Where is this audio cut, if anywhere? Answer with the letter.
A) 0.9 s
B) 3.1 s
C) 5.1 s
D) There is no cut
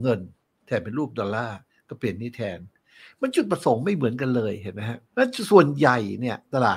C